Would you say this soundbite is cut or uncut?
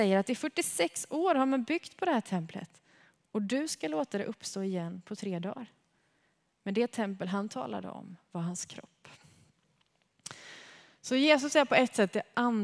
uncut